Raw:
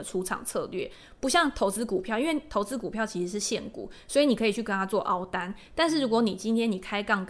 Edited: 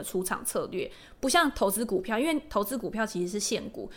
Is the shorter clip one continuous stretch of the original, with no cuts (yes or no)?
yes